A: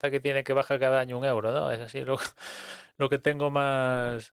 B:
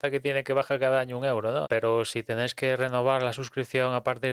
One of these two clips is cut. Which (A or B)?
B